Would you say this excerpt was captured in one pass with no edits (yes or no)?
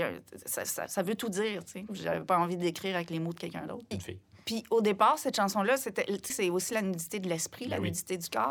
no